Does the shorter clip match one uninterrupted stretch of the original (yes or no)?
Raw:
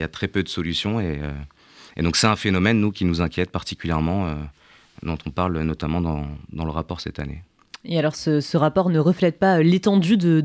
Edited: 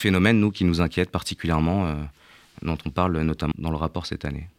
no